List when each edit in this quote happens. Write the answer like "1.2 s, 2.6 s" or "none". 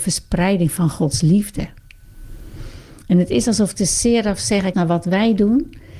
4.7 s